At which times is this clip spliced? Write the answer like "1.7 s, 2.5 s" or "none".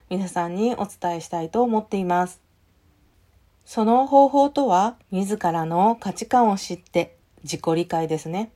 5.0 s